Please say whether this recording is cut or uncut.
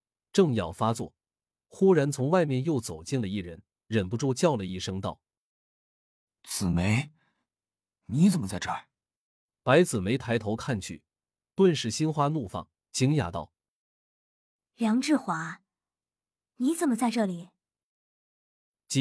cut